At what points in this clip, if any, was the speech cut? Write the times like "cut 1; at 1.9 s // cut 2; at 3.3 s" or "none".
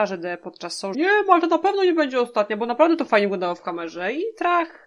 cut 1; at 0.9 s